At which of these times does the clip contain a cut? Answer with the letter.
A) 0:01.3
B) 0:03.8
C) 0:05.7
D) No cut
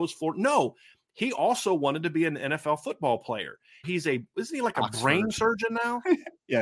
B